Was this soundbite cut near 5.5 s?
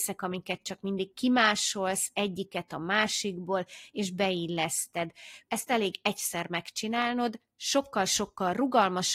yes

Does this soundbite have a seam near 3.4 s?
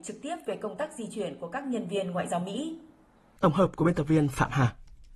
yes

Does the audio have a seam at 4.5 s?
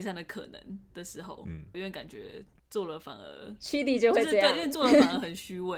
no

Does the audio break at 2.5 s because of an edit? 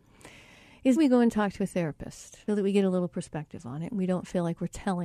yes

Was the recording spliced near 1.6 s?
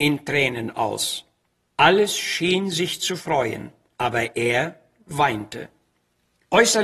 no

